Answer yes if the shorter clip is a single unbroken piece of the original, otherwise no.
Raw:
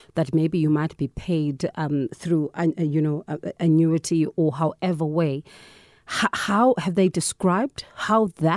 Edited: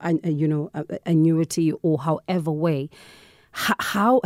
yes